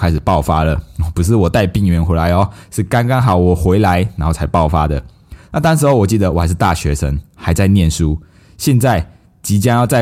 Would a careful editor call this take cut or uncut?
uncut